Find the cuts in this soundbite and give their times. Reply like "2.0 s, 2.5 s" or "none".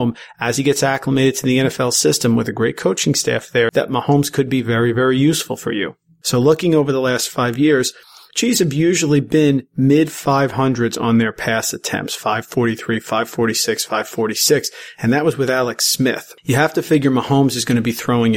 3.7 s, 6.2 s